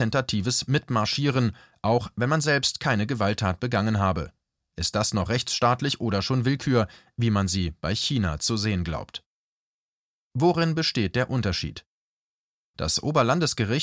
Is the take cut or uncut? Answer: cut